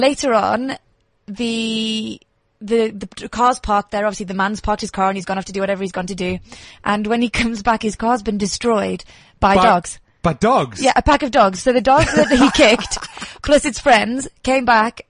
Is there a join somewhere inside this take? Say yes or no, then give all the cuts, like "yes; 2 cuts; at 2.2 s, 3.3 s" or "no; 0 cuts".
no; 0 cuts